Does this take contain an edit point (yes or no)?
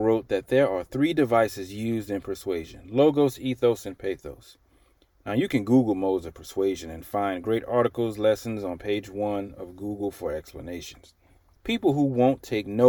yes